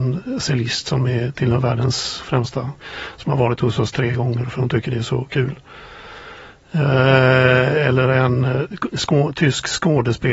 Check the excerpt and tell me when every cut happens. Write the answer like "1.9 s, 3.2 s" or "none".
none